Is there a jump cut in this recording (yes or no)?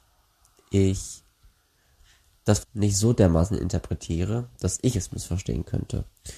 yes